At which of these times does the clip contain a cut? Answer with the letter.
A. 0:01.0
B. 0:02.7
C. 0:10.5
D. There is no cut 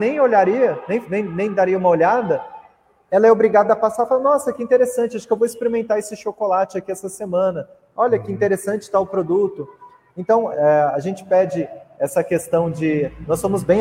C